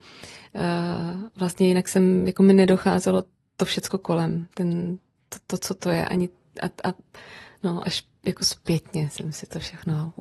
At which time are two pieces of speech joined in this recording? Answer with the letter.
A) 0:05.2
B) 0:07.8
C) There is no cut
B